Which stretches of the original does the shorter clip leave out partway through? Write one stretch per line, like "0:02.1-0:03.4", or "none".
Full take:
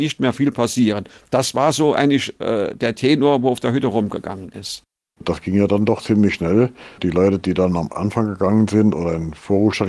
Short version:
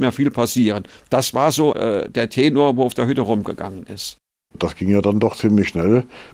0:01.9-0:02.4